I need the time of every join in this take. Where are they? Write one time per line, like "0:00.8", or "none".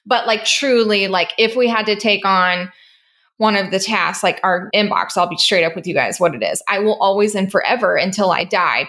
none